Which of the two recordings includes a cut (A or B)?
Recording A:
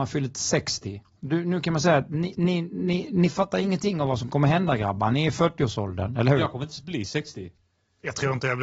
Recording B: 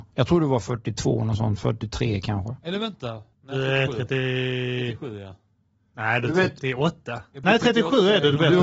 B